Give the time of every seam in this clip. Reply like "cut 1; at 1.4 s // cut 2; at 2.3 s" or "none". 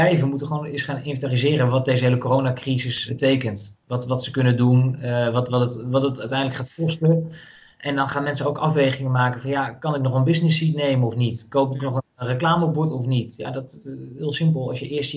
cut 1; at 3.1 s